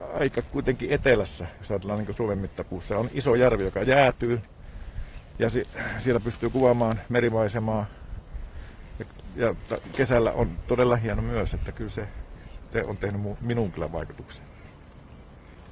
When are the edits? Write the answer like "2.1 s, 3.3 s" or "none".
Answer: none